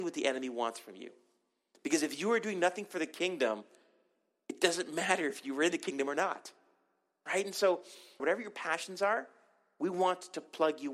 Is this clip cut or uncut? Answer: cut